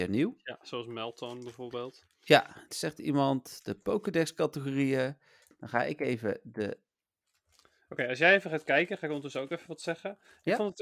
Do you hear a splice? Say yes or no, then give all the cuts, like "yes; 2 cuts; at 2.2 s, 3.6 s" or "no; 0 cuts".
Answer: yes; 2 cuts; at 2.7 s, 5.5 s